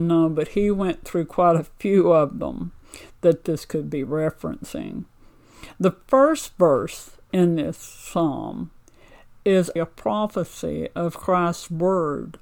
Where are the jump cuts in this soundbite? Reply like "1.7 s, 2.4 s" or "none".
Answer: 9.8 s